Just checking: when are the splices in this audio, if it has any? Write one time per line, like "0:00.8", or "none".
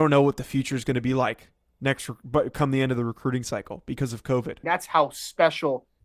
0:04.6